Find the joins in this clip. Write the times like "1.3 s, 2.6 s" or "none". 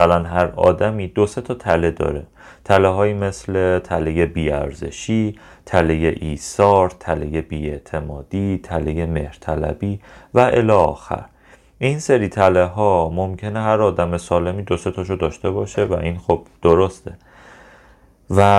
none